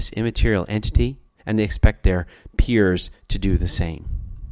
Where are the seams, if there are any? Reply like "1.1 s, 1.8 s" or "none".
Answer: 1.4 s